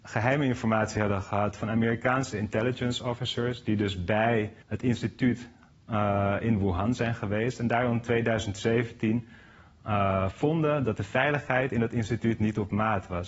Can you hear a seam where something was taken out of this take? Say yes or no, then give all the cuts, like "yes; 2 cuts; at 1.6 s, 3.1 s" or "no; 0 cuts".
yes; 1 cut; at 4.6 s